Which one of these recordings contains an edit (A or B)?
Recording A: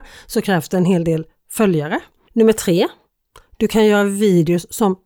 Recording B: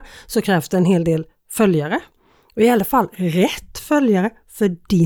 A